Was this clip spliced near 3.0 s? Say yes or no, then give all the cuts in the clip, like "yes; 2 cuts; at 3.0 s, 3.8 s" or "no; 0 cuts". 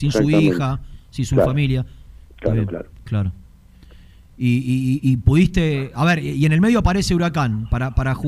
no; 0 cuts